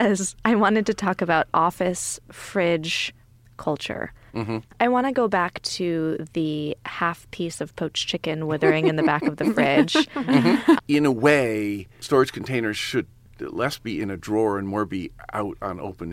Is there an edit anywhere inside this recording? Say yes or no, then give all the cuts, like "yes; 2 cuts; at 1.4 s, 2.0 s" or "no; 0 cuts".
yes; 2 cuts; at 4.3 s, 10.8 s